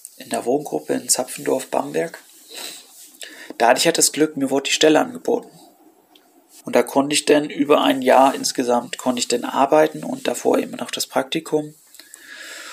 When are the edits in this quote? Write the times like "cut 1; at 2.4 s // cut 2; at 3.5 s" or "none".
cut 1; at 6.6 s